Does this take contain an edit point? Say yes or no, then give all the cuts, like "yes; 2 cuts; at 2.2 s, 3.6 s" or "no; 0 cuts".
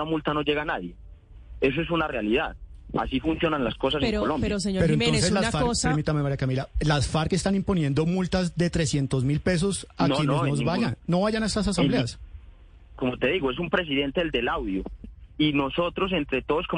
yes; 2 cuts; at 13.0 s, 15.0 s